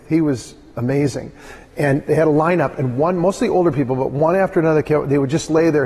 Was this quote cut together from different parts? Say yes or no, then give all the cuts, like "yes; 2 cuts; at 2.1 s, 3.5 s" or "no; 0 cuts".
no; 0 cuts